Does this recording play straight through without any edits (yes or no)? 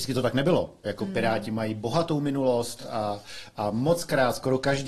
yes